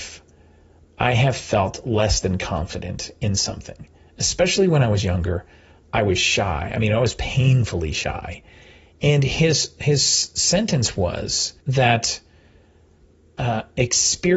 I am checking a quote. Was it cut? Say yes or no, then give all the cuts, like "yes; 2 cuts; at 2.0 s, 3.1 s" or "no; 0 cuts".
yes; 2 cuts; at 9.0 s, 11.6 s